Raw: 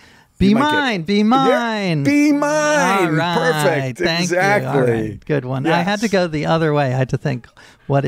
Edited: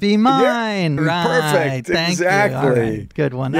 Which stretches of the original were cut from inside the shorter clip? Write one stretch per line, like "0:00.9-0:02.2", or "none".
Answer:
0:02.0-0:03.1

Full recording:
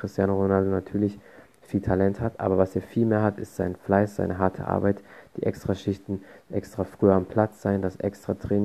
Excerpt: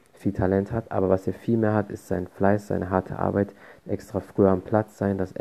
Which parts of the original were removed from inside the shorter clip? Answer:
0:05.3-0:06.4

